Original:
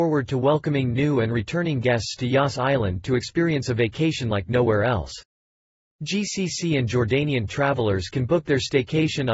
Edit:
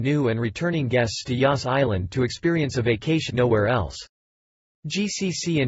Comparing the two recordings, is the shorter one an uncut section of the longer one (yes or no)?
no